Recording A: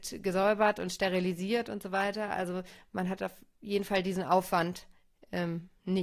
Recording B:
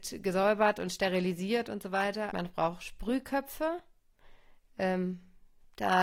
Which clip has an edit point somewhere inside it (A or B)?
B